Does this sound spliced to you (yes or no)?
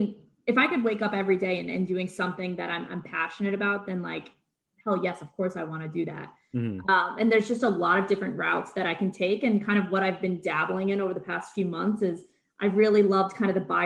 no